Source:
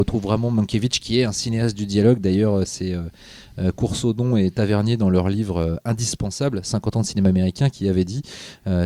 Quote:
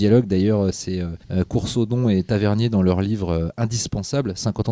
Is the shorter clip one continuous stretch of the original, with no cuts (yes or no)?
no